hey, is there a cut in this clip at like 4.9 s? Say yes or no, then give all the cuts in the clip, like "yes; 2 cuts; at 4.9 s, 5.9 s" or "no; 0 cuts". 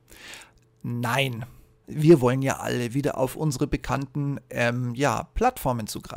no; 1 cut; at 1.8 s